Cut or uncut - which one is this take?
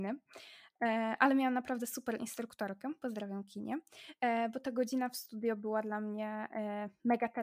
uncut